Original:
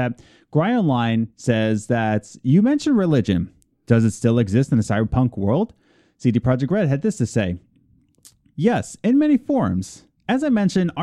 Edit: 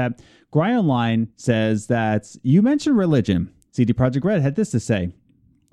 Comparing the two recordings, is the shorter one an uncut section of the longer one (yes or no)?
no